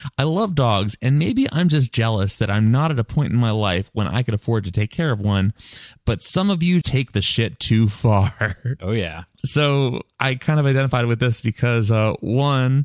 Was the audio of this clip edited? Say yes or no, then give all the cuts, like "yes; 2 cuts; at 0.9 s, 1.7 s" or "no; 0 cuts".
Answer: yes; 2 cuts; at 6.8 s, 8.8 s